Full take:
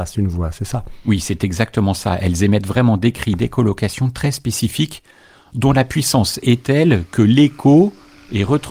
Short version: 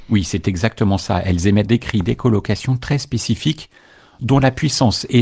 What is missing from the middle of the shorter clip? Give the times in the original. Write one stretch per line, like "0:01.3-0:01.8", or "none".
0:02.6-0:03.0